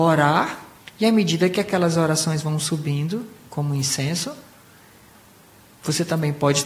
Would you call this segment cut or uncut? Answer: uncut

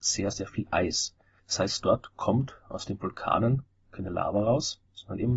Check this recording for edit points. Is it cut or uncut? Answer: cut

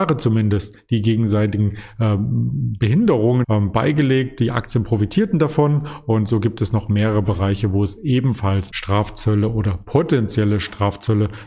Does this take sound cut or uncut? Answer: cut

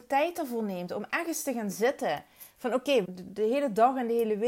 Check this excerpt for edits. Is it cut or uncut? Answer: cut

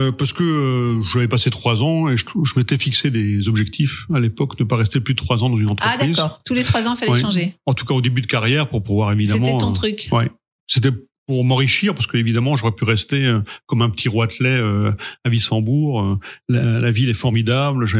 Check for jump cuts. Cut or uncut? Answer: uncut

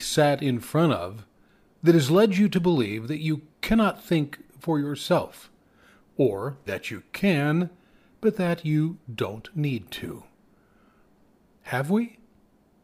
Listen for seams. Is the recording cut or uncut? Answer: cut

